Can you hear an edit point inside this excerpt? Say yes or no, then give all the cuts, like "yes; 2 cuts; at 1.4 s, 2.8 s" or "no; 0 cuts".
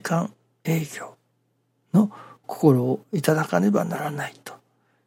no; 0 cuts